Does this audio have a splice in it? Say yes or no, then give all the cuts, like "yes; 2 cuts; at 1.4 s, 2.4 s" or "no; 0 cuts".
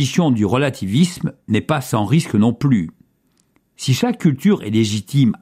no; 0 cuts